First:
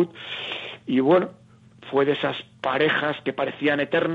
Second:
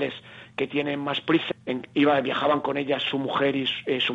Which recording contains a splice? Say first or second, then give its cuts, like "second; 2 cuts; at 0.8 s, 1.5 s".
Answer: second; 1 cut; at 1.5 s